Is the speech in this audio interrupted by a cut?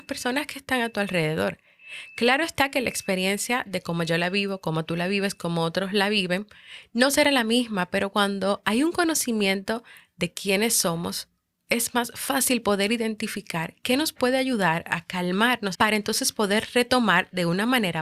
yes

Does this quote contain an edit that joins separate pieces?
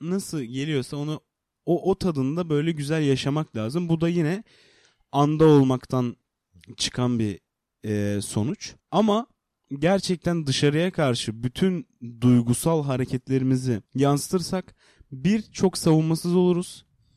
yes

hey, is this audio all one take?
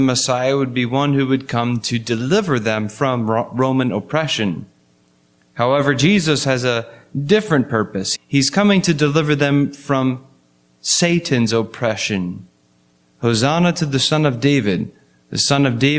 no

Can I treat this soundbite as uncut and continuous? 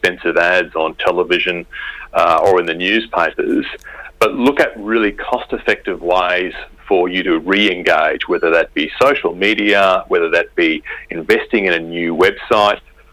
yes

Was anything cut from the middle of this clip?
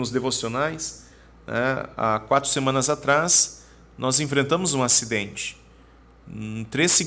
no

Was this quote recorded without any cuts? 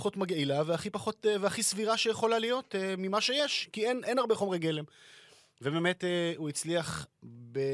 yes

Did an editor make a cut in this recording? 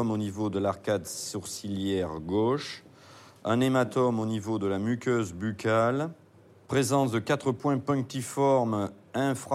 no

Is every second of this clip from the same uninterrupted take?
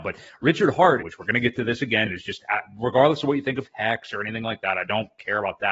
no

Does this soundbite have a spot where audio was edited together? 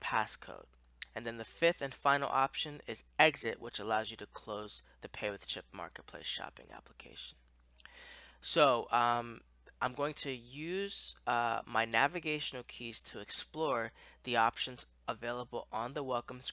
no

